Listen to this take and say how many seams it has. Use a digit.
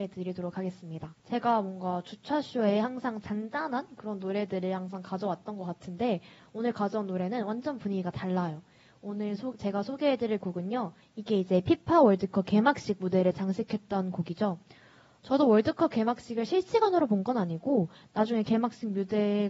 2